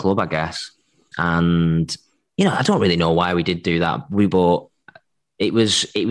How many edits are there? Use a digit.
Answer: 2